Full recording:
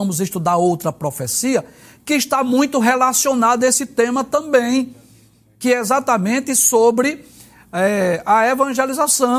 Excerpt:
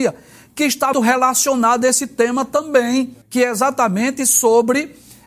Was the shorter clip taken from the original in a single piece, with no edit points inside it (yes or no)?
no